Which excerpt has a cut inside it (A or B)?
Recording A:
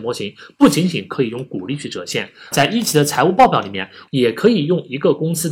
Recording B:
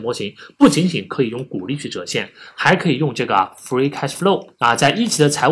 A